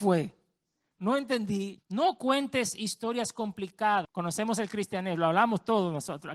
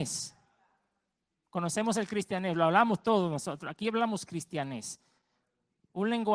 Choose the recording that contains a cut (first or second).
first